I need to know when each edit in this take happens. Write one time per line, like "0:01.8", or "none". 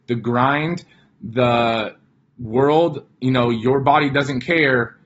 none